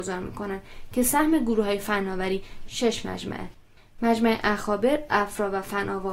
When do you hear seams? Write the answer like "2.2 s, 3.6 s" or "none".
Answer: 5.1 s